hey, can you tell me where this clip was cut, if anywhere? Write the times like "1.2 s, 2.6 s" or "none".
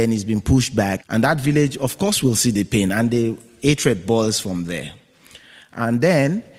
1.0 s